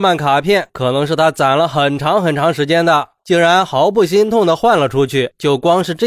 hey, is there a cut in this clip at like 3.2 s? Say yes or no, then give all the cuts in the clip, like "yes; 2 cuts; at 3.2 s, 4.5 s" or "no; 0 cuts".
yes; 1 cut; at 3.2 s